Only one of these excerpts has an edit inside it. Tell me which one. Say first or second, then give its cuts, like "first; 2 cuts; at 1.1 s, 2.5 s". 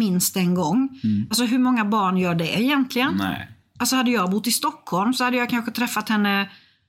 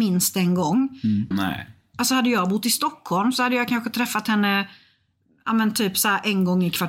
second; 1 cut; at 1.3 s